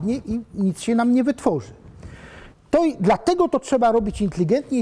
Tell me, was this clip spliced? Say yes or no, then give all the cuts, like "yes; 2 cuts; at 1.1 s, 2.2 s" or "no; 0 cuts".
yes; 1 cut; at 2.5 s